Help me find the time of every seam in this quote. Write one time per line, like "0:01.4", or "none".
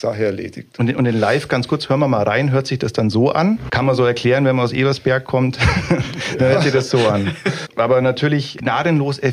0:03.7
0:07.6